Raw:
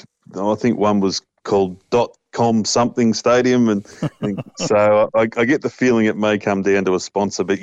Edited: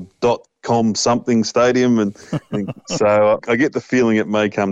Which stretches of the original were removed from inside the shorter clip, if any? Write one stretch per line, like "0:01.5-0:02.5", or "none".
0:05.1-0:05.3